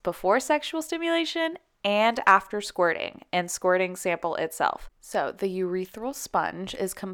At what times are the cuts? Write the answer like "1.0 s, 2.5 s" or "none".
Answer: 4.9 s